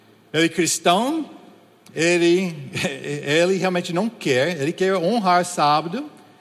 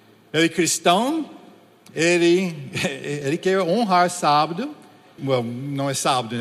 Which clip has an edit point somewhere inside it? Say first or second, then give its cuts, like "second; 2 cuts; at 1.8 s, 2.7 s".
second; 2 cuts; at 3.2 s, 5.2 s